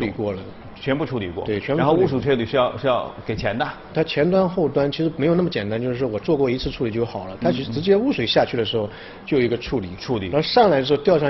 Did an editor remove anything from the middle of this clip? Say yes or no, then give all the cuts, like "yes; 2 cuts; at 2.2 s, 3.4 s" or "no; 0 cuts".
no; 0 cuts